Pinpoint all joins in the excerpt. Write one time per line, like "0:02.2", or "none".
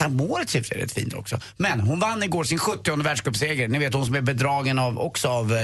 none